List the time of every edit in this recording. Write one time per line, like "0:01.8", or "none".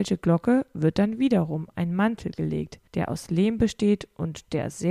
0:02.9